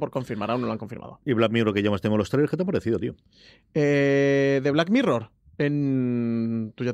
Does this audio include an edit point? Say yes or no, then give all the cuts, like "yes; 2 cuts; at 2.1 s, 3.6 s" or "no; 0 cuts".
no; 0 cuts